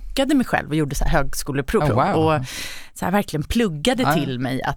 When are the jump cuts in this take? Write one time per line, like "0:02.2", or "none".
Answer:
0:01.8